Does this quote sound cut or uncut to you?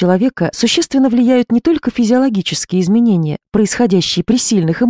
uncut